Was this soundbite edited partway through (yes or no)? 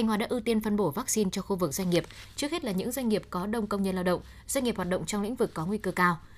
no